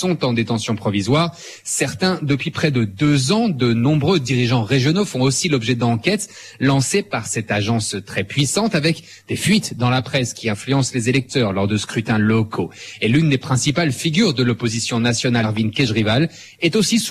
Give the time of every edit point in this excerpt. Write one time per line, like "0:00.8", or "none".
0:15.4